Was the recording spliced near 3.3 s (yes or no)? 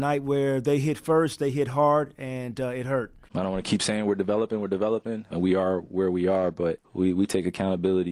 yes